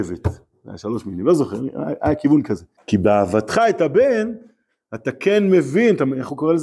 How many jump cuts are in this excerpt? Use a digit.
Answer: 1